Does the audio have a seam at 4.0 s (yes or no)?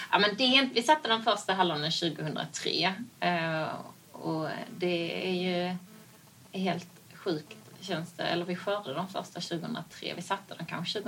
no